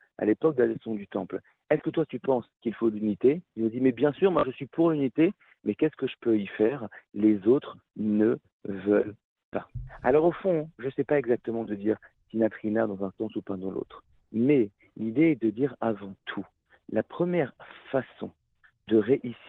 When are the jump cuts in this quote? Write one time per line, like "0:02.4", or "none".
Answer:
none